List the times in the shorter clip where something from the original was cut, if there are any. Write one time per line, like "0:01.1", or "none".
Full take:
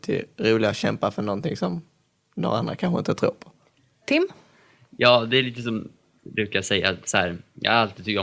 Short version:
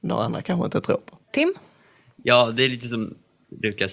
0:01.2